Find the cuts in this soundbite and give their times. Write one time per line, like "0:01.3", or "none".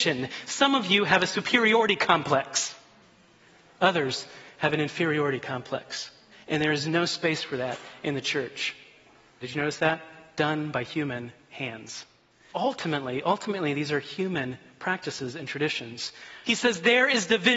0:09.4
0:12.5
0:16.4